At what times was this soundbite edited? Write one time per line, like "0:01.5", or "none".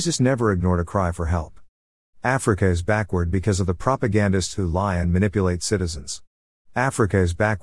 0:02.0